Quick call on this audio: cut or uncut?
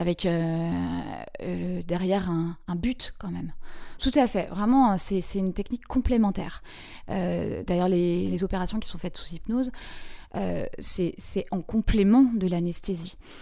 cut